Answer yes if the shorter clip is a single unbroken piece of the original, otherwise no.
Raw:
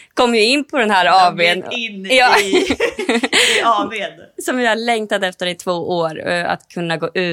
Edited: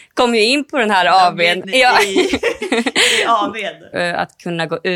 no